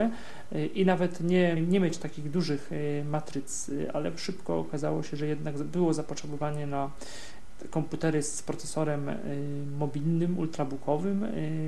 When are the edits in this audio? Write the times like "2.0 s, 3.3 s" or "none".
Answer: 1.6 s